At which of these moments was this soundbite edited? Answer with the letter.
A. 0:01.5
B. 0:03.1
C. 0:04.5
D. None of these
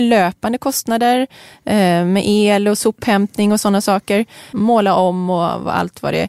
C